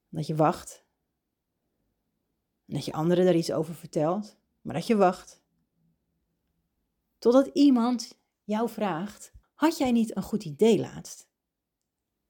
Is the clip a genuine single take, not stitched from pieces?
no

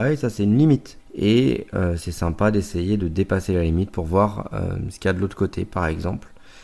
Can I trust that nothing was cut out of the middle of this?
no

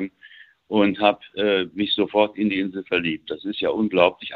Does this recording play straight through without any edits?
yes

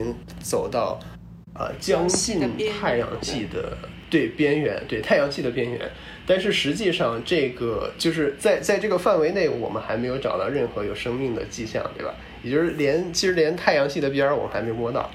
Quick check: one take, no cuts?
yes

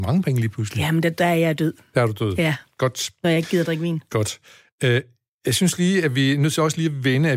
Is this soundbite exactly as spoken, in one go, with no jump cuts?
yes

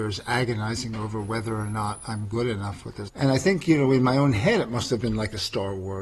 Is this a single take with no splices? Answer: no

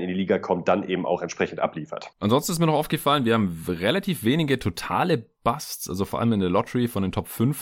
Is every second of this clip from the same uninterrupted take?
no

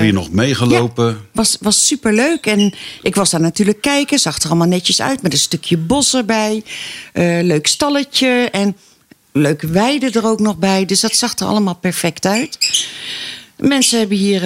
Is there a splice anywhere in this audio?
no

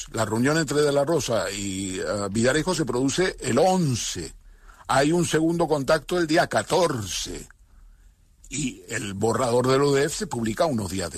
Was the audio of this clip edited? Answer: no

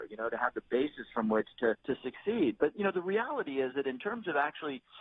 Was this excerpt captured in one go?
no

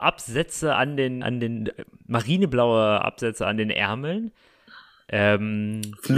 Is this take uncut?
no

